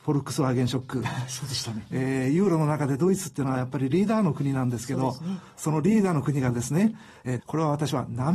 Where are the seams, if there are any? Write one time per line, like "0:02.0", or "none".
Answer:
0:01.9
0:07.4